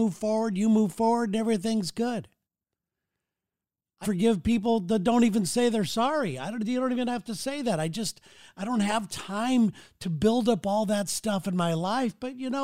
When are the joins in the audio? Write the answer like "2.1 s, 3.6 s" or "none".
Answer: 4.0 s